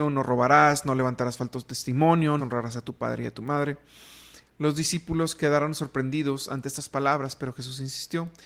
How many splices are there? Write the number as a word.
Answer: two